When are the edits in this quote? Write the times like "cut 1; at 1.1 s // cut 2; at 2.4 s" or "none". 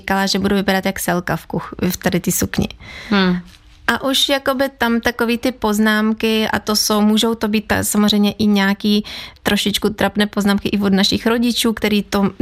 none